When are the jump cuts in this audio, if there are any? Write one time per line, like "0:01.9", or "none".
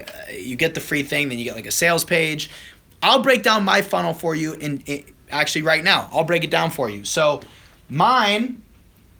none